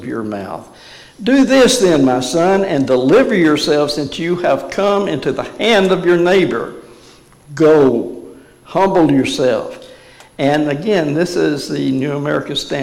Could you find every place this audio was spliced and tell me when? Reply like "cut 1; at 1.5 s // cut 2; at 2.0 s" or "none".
none